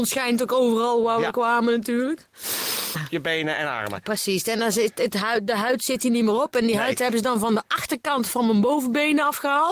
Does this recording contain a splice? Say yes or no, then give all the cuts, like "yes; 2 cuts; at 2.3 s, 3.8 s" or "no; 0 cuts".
yes; 1 cut; at 2.9 s